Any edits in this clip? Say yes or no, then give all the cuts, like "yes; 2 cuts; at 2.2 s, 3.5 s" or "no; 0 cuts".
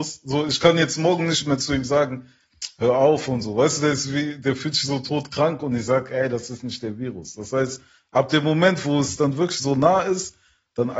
no; 0 cuts